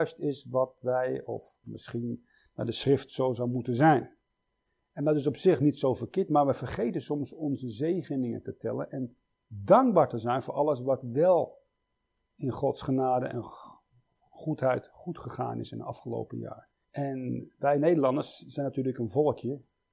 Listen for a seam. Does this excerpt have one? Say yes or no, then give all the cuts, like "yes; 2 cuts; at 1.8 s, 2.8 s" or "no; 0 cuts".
yes; 1 cut; at 16.8 s